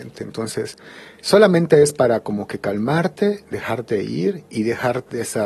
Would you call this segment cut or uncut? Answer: uncut